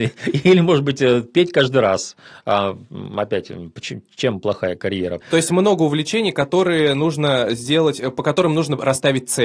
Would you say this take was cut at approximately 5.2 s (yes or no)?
yes